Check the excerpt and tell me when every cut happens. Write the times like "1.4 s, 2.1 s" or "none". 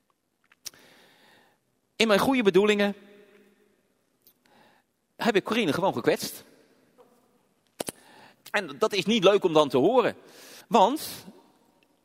8.4 s, 10.6 s